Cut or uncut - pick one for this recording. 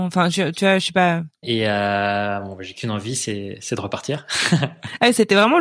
cut